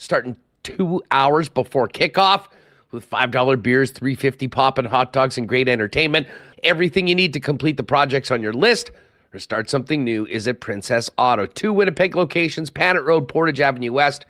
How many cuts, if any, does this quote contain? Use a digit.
1